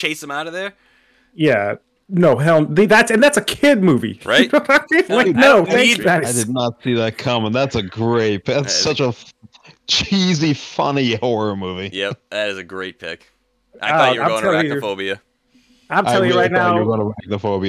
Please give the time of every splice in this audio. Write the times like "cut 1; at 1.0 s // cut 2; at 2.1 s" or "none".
cut 1; at 6.0 s